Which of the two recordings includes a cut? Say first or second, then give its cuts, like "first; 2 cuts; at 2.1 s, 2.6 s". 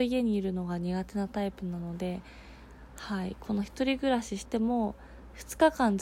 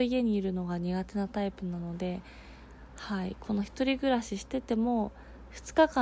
first; 1 cut; at 4.5 s